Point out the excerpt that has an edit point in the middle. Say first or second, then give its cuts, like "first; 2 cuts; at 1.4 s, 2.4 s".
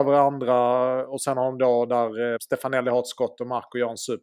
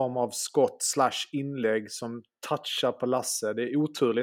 first; 1 cut; at 2.4 s